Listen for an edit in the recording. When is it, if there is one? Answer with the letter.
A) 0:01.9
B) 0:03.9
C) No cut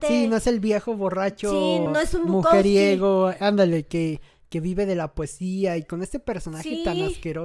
A